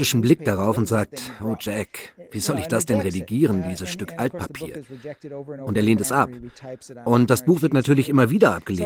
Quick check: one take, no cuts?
yes; 0 cuts

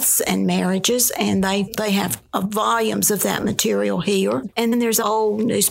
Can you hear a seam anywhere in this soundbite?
yes; 1 cut; at 4.7 s

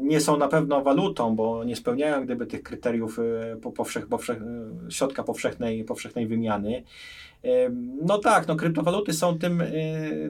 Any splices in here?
no; 0 cuts

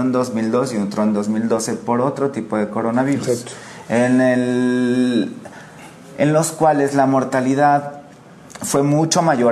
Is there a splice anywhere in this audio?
no; 0 cuts

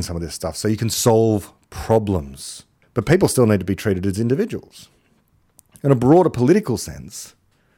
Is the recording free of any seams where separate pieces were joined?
yes; 0 cuts

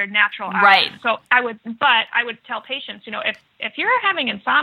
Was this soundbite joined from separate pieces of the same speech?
yes; 1 cut; at 1.2 s

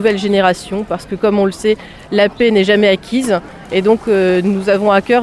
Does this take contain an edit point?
yes; 1 cut; at 3.7 s

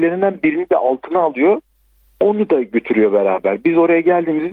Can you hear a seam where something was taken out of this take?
no; 0 cuts

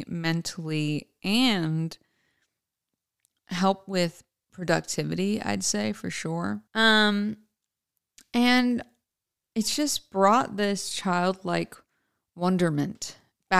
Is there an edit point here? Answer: yes; 1 cut; at 6.7 s

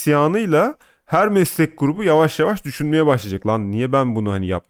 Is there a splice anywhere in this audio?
no; 0 cuts

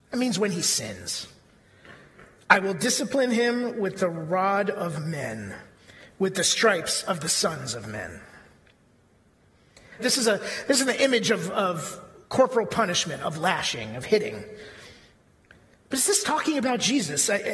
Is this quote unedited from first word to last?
no; 1 cut; at 10.0 s

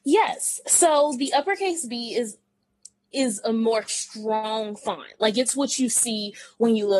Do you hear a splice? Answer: no; 0 cuts

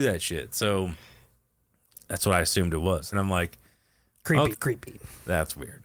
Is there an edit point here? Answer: yes; 2 cuts; at 3.1 s, 4.5 s

